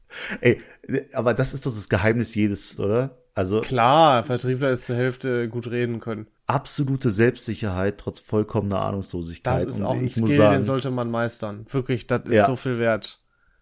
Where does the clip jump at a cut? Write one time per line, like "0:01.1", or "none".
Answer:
0:02.8
0:06.4